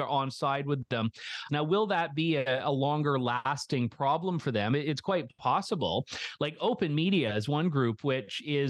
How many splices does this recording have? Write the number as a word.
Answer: one